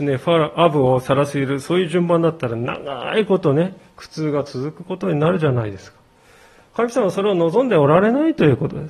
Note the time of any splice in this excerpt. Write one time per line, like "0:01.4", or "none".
none